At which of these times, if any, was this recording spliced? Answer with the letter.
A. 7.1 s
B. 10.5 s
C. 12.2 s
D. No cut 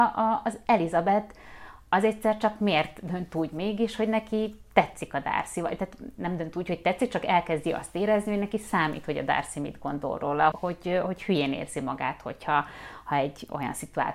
B